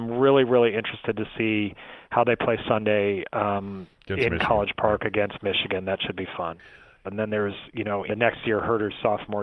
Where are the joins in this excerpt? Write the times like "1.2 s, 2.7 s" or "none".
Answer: 7.0 s, 8.1 s